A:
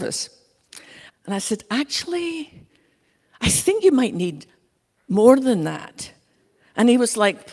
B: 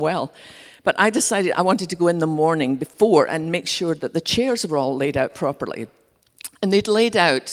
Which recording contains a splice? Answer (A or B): A